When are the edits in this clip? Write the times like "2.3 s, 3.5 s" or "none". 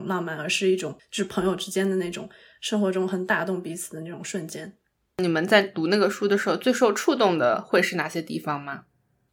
5.0 s